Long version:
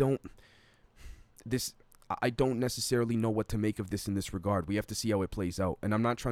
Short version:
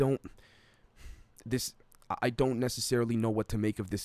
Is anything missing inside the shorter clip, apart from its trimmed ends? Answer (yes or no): no